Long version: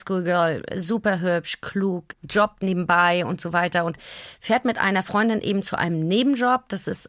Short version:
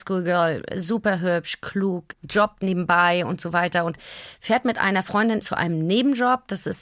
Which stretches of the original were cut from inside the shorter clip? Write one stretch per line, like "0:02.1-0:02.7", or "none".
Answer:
0:05.4-0:05.6